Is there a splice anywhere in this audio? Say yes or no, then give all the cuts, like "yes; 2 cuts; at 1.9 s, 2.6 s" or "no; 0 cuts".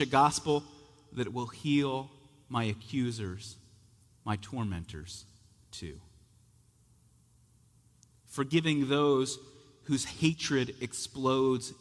no; 0 cuts